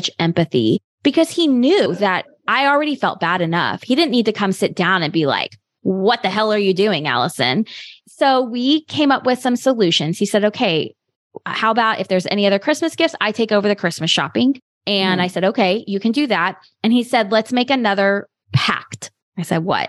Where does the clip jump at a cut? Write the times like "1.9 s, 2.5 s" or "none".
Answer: 8.0 s